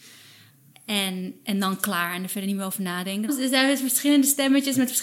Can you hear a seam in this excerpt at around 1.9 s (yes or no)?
no